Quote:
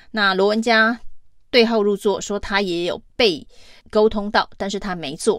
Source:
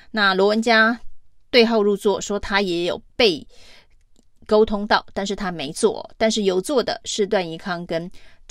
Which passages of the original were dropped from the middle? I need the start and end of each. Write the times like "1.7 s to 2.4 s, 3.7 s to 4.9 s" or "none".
3.8 s to 4.4 s